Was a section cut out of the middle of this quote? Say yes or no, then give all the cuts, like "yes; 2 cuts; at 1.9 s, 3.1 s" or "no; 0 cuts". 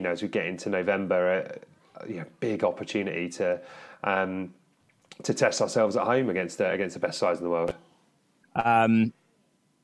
yes; 1 cut; at 8.4 s